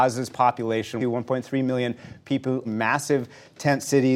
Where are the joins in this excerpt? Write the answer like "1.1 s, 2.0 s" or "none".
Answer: 1.0 s, 2.6 s